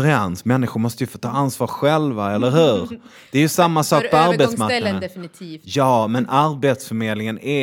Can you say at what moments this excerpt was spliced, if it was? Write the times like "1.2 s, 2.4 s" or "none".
none

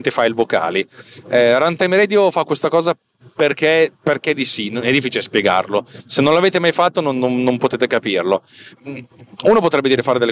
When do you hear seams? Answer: 8.7 s

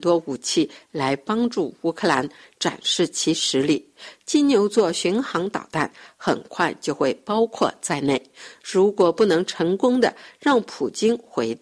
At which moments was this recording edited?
none

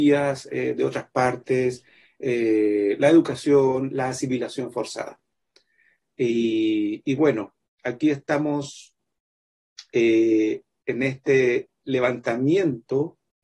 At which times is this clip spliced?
none

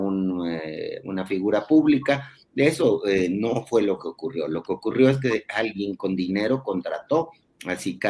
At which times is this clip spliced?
none

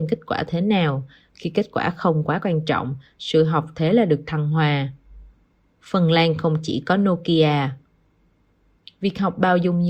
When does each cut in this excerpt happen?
none

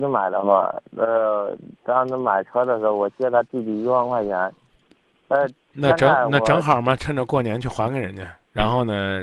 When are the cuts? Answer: none

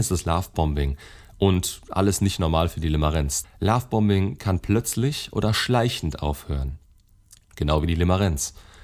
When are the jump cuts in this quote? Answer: 3.4 s

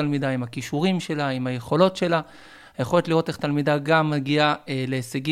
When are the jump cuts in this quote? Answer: none

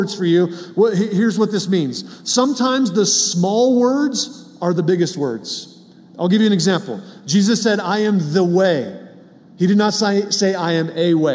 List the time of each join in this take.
none

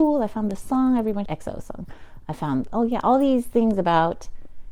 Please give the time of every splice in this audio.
1.2 s, 2.7 s

